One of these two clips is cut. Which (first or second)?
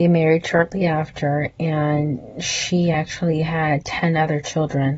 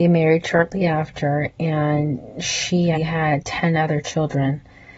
second